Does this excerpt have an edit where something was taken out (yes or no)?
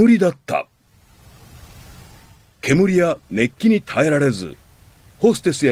no